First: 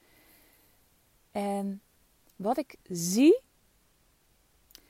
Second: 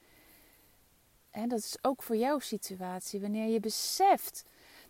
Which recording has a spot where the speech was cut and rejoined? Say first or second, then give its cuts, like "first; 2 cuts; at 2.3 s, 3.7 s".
second; 1 cut; at 1.2 s